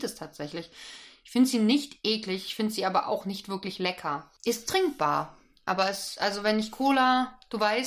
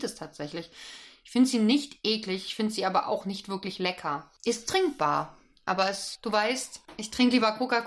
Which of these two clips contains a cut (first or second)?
second